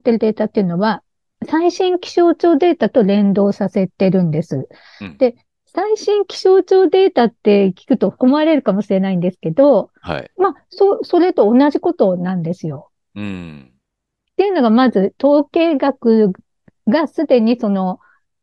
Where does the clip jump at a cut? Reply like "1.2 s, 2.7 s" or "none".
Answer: 8.2 s, 10.3 s